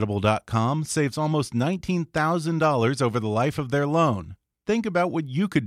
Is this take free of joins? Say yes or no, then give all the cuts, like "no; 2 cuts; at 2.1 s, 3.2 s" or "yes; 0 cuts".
yes; 0 cuts